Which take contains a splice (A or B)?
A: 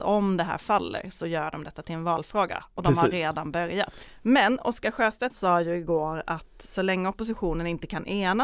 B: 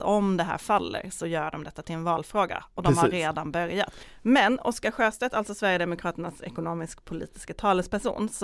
A